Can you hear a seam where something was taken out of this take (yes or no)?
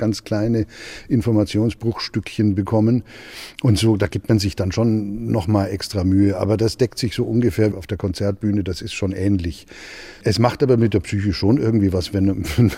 yes